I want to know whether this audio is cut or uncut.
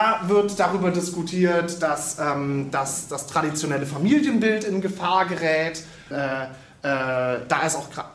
cut